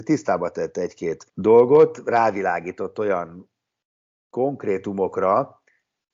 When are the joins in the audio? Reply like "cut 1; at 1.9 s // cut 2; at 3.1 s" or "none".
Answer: cut 1; at 1.3 s